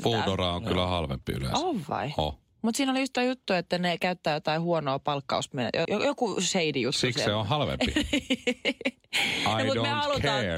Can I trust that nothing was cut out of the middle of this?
no; 1 cut; at 5.8 s

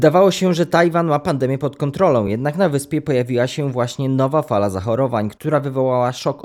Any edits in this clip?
no; 0 cuts

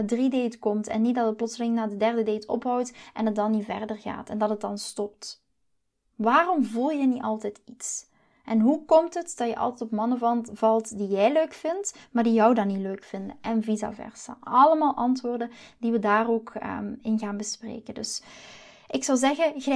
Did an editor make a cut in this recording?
no; 0 cuts

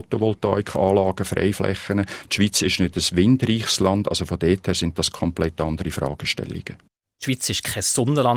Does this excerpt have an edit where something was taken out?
no; 0 cuts

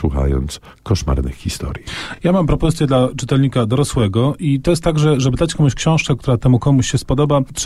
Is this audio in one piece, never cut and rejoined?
yes; 0 cuts

